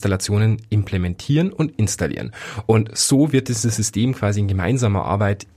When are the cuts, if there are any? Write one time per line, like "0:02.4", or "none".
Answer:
none